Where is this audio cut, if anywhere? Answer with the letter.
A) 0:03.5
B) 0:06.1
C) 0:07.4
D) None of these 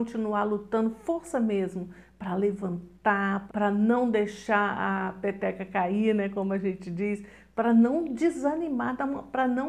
A